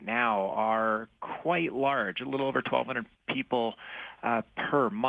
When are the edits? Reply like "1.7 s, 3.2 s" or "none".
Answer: 3.1 s